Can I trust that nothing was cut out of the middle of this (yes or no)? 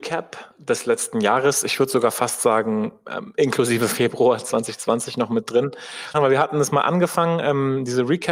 no